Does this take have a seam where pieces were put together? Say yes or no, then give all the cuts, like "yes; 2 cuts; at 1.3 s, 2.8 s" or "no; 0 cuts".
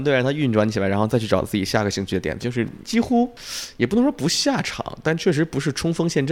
yes; 1 cut; at 2.4 s